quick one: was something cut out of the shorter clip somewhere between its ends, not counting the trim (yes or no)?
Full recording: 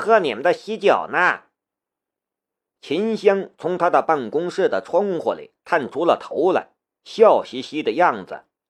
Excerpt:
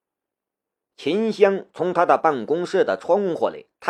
no